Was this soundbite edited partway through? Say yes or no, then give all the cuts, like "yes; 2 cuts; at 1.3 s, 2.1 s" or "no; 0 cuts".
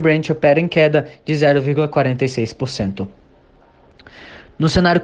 no; 0 cuts